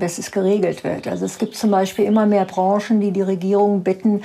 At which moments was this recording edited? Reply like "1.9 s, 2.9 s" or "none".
none

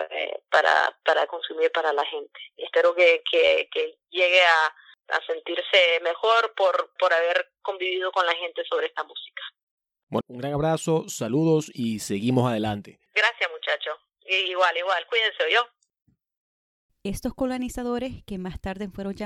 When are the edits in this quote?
7.0 s, 10.2 s, 16.9 s

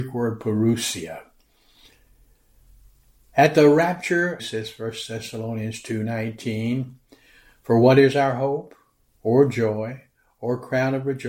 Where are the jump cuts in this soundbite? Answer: 4.4 s

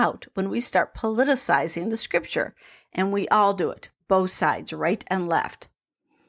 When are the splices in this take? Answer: none

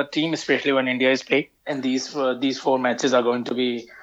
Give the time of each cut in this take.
1.6 s

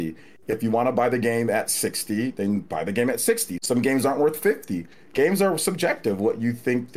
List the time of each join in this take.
3.6 s

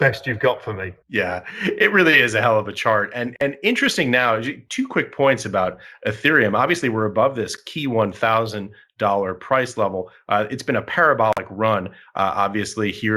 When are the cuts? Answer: 1.0 s

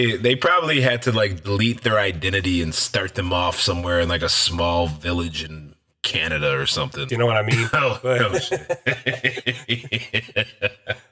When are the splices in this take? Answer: 7.1 s

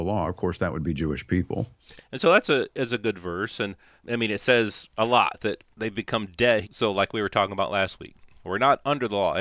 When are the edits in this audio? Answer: 2.0 s, 6.6 s

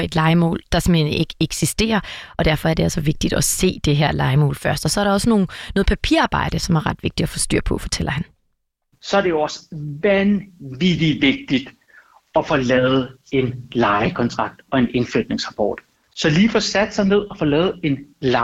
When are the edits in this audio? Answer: 15.9 s

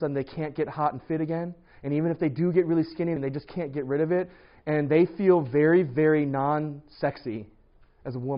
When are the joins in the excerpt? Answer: 3.2 s

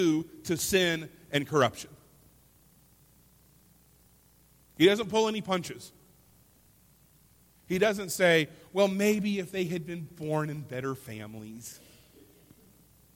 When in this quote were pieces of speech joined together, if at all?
none

